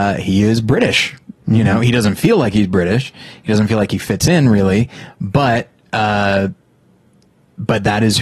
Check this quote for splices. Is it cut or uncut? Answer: uncut